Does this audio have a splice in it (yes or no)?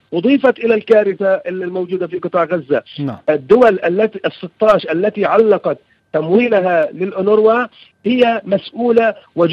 no